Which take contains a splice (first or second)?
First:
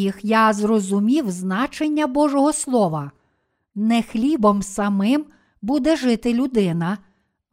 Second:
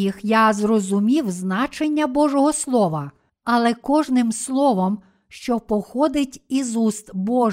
second